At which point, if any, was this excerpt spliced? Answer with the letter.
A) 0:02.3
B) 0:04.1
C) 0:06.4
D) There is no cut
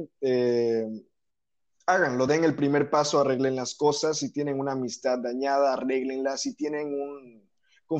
D